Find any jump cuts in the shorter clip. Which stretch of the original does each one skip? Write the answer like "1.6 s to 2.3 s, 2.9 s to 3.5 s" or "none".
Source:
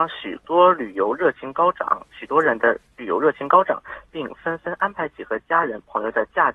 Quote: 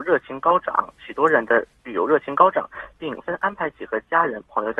4.3 s to 4.6 s